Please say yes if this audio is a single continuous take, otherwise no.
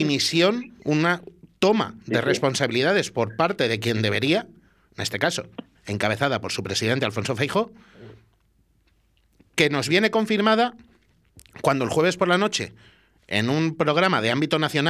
no